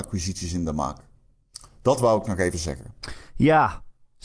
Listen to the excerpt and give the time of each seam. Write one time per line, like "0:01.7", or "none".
none